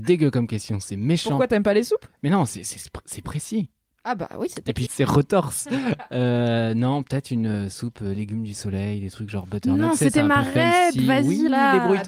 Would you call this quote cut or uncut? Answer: cut